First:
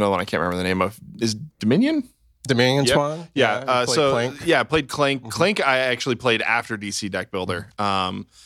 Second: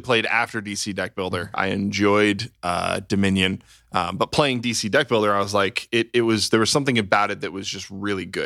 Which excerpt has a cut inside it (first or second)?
second